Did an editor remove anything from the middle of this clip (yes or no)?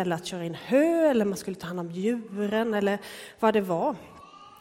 no